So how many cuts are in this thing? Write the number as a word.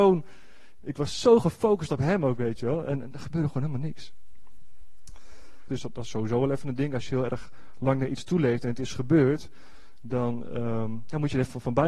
one